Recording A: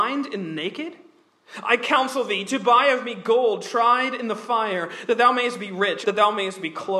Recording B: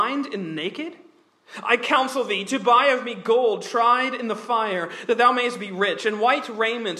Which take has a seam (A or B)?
A